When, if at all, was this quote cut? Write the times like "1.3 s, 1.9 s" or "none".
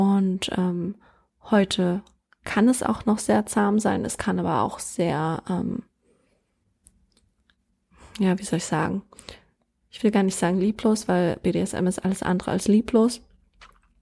none